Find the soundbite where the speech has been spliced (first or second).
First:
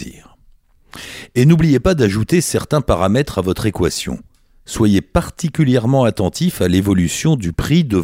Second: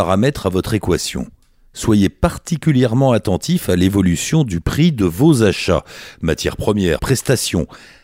second